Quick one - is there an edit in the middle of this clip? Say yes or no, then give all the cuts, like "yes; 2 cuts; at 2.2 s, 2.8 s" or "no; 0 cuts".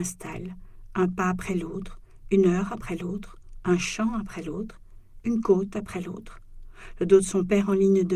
no; 0 cuts